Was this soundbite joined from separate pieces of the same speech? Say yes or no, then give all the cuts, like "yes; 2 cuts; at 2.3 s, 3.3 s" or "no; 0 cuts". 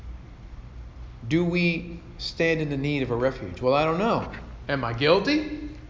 no; 0 cuts